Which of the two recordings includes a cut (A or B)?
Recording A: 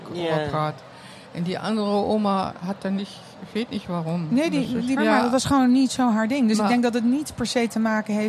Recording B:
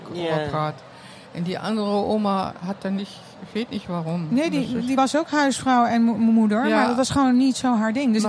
A